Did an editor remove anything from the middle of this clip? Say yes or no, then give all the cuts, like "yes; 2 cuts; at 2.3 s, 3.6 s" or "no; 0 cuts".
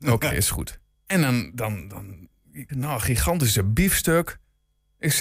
yes; 2 cuts; at 0.9 s, 2.7 s